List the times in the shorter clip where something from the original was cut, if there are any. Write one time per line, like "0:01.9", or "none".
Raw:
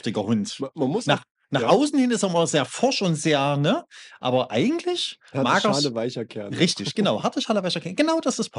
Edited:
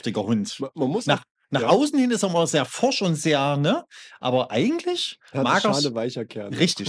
none